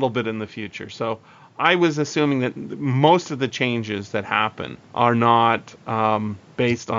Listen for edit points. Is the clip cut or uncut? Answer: cut